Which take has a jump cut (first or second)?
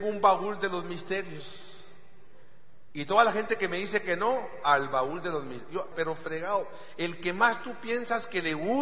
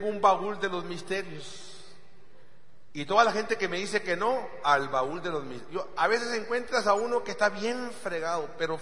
first